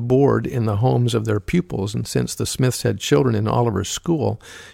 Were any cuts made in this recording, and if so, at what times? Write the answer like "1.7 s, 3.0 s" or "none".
none